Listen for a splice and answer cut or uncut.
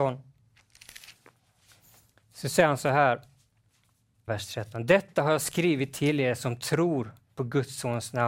cut